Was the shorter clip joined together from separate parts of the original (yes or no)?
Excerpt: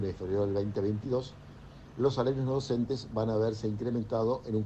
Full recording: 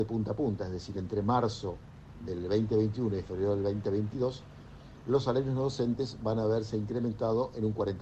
no